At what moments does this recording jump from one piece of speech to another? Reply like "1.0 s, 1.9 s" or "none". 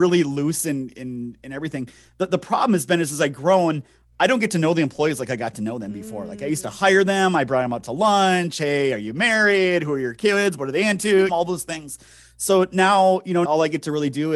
11.3 s, 13.4 s